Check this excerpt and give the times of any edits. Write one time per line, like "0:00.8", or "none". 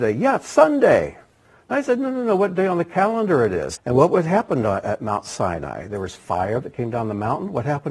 0:03.8